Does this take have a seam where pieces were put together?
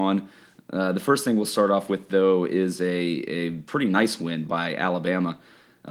no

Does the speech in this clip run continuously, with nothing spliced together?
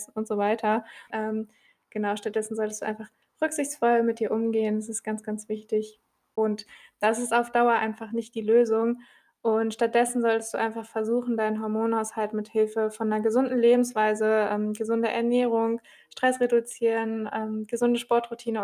no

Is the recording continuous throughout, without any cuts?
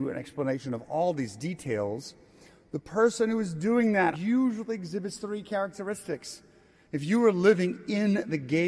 no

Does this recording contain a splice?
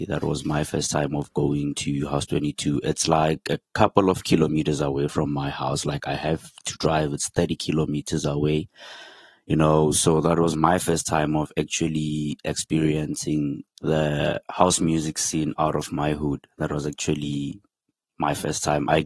no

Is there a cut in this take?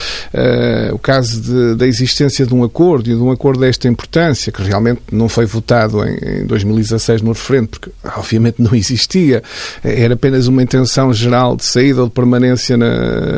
no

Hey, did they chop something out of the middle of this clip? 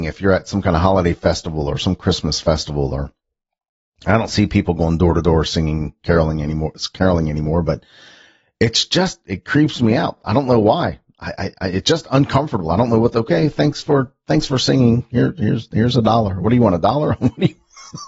no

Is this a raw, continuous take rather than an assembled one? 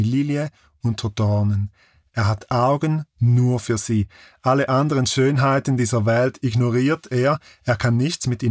yes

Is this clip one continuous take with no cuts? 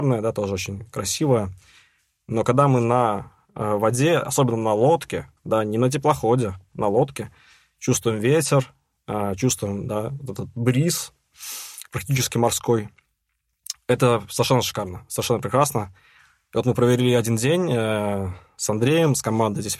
yes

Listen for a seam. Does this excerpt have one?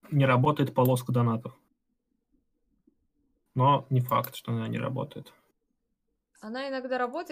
no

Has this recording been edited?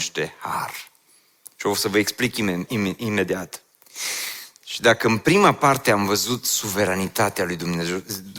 no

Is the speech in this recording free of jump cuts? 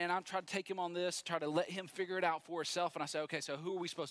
yes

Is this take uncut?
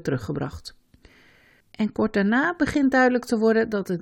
no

